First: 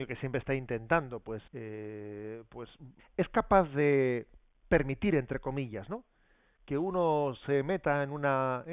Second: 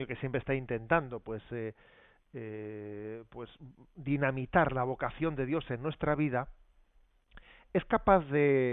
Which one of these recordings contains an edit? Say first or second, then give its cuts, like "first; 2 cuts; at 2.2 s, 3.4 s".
first; 2 cuts; at 1.5 s, 3.0 s